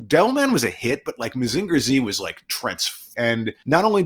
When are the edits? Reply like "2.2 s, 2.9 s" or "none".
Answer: 3.1 s